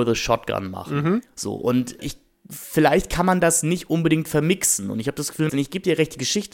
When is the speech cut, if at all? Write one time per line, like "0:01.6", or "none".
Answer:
0:02.0
0:05.5